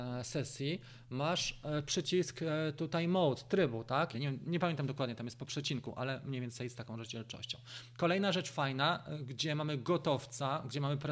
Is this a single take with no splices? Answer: no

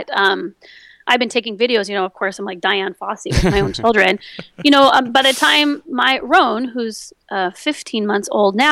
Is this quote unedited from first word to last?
yes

